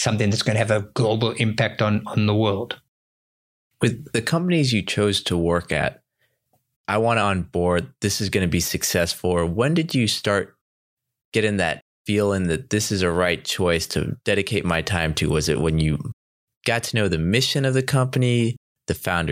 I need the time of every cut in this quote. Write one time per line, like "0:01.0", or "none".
0:06.7